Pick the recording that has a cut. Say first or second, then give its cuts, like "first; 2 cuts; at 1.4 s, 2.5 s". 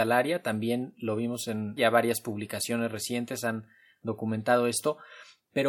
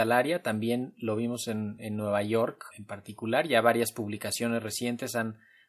first; 1 cut; at 1.8 s